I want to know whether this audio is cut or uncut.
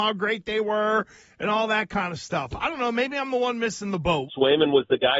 cut